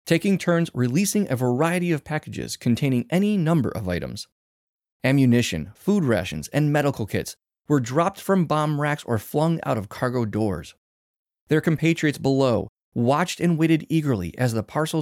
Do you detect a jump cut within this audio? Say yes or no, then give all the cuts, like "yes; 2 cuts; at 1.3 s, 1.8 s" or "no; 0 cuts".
no; 0 cuts